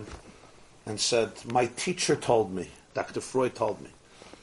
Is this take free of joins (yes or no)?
yes